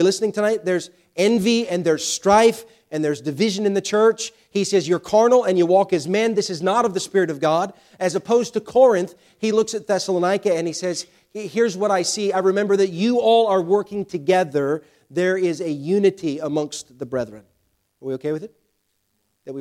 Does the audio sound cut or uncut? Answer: cut